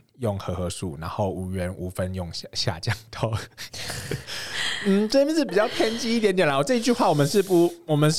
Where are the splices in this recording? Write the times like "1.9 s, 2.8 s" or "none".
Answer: none